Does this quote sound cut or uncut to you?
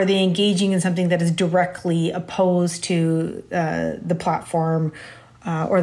uncut